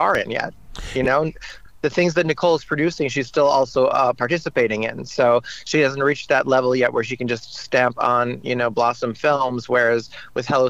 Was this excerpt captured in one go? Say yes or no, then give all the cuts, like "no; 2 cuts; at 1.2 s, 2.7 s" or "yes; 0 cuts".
yes; 0 cuts